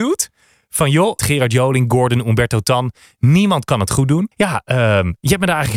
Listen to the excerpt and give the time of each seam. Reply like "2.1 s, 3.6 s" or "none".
1.2 s, 4.3 s